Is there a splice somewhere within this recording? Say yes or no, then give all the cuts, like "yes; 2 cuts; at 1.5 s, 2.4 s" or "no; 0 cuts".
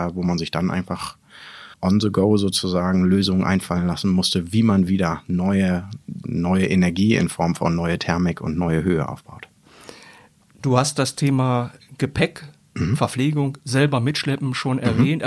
yes; 1 cut; at 1.7 s